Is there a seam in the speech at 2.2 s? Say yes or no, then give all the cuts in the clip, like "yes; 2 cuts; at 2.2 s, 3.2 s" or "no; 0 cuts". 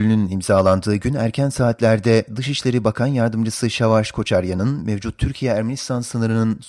no; 0 cuts